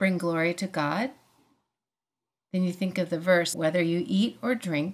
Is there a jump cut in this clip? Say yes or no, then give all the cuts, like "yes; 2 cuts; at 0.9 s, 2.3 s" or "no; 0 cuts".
yes; 1 cut; at 3.5 s